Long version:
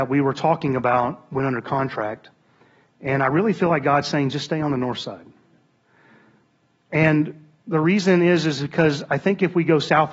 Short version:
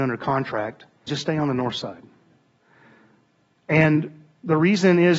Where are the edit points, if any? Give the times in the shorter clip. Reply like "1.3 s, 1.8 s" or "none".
1.1 s